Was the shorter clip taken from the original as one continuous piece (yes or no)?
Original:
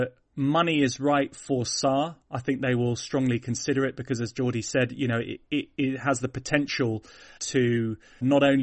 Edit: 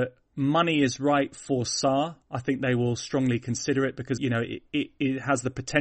no